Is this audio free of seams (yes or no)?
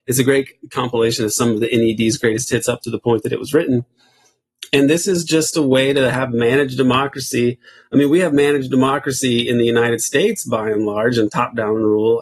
yes